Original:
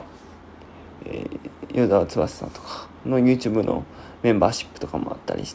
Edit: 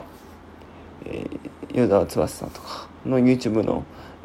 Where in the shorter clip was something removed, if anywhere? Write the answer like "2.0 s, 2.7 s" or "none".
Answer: none